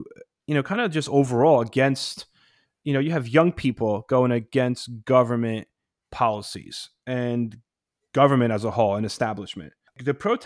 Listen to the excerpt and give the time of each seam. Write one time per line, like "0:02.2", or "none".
none